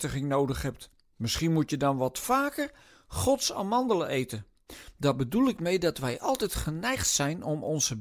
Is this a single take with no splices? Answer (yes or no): yes